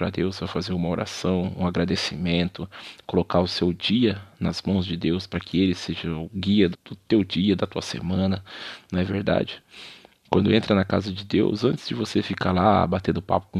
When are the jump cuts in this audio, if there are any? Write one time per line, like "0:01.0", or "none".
0:06.7

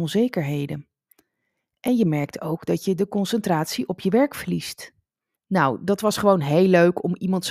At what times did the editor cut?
0:05.3

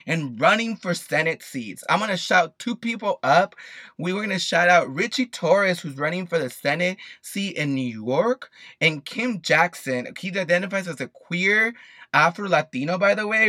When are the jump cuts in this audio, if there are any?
none

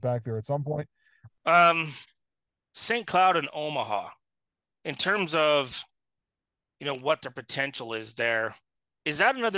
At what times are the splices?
0:01.3

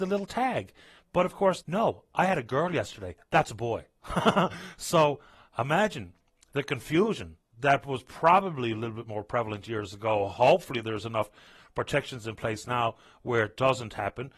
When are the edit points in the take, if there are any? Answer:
0:01.6

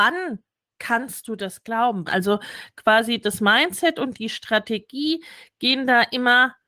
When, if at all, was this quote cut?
0:02.1

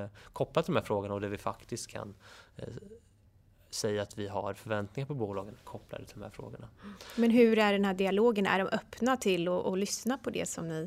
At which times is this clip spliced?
none

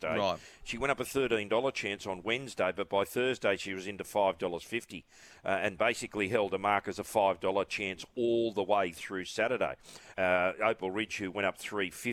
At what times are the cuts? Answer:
0:10.1

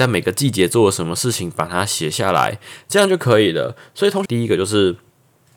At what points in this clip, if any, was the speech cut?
0:04.3

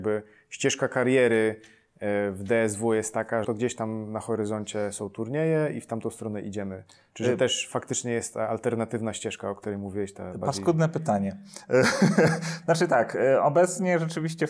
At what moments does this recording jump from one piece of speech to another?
0:03.4
0:12.6

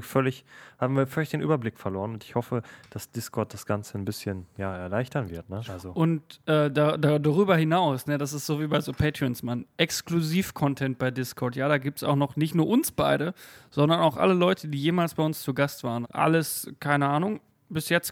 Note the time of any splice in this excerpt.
0:05.6
0:16.0

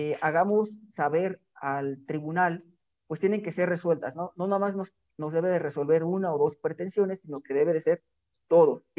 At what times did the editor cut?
none

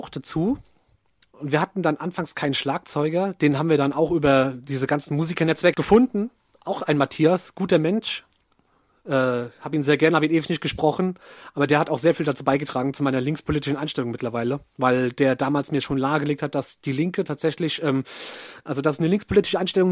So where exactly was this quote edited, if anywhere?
0:05.7

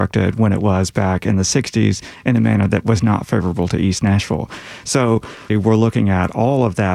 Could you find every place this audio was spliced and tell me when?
0:05.5

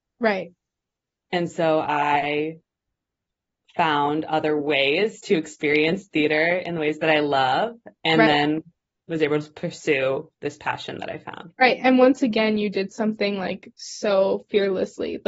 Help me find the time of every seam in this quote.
none

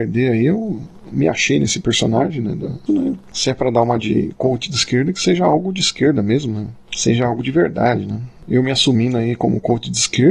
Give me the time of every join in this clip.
0:02.9

